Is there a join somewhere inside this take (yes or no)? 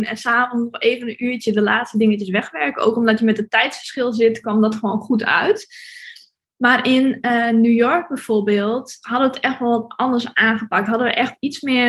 no